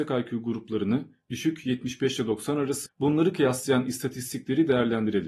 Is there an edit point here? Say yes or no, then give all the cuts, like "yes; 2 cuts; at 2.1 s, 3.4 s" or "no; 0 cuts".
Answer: yes; 1 cut; at 2.9 s